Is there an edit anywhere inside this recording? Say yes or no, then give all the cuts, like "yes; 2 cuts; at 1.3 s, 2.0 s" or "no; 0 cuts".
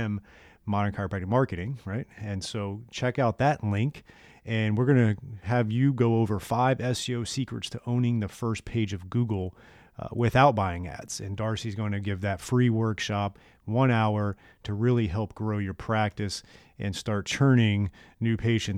no; 0 cuts